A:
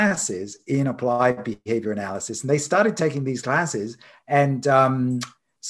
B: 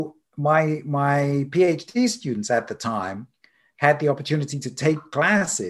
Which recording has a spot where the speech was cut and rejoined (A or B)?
A